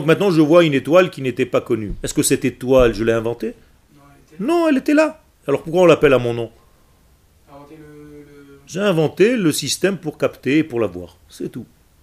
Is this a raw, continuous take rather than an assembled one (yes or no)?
yes